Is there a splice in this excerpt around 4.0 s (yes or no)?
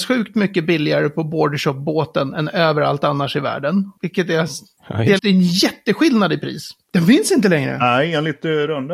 no